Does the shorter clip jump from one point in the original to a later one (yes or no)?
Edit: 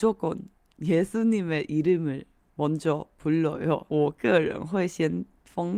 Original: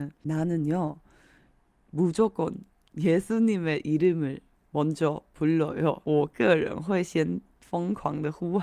no